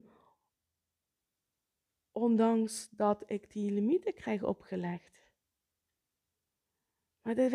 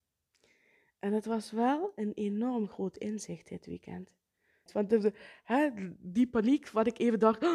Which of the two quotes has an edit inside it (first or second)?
second